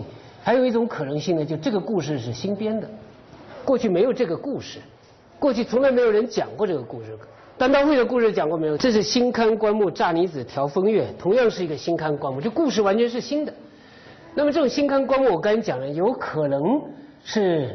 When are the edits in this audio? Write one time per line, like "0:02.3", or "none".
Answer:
0:08.8